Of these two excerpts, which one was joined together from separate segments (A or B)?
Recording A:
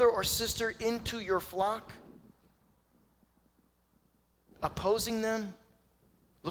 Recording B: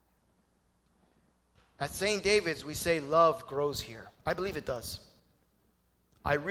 B